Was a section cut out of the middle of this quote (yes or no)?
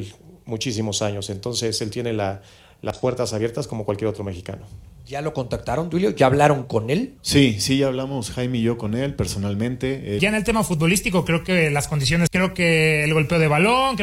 yes